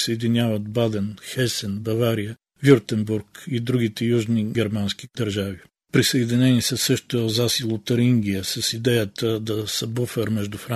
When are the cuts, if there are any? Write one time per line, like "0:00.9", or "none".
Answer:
none